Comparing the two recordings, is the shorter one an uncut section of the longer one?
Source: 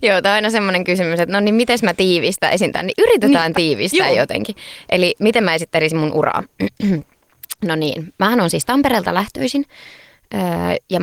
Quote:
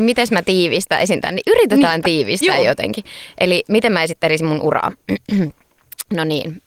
yes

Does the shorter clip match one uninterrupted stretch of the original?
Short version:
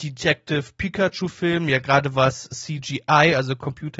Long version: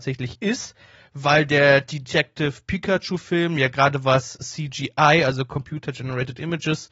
yes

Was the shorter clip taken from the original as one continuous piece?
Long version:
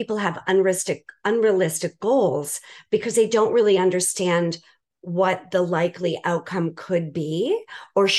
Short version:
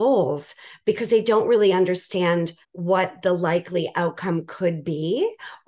no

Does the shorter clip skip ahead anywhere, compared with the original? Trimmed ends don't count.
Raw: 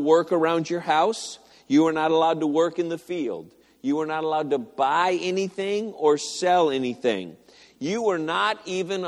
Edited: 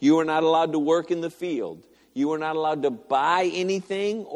no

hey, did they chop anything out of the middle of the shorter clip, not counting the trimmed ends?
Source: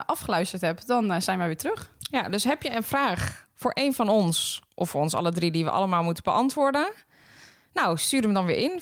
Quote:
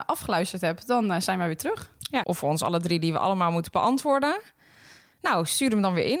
yes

